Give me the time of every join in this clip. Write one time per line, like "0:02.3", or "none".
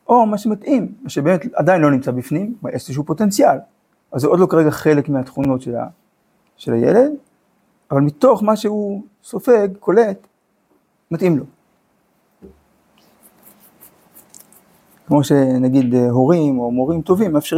none